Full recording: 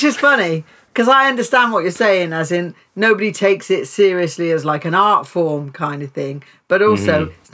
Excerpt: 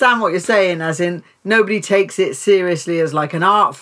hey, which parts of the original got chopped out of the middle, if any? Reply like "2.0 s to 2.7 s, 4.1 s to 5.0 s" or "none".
none